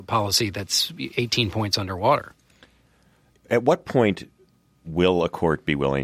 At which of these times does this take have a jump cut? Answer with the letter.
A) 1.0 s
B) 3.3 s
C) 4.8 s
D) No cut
B